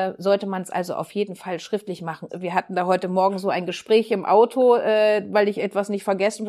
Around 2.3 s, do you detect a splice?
yes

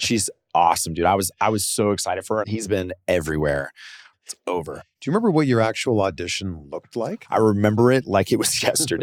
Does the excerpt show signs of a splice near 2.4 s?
yes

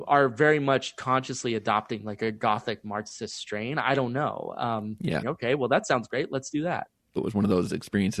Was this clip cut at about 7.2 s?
yes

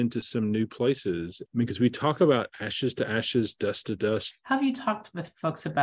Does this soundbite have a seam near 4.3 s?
yes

